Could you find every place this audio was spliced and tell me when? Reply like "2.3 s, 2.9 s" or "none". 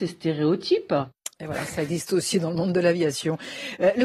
none